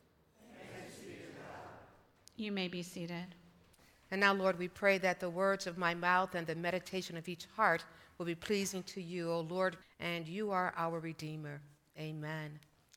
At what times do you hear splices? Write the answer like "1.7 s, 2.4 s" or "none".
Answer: 9.8 s